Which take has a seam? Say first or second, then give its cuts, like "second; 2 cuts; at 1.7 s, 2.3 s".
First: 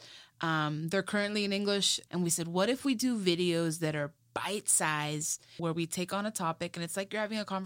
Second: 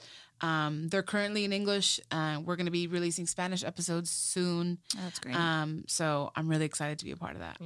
first; 2 cuts; at 2.1 s, 5.6 s